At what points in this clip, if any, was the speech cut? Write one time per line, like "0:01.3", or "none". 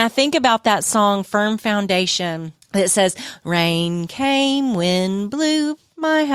0:02.6